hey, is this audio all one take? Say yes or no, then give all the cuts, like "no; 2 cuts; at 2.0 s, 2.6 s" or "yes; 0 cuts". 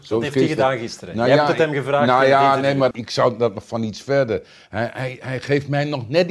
no; 1 cut; at 2.9 s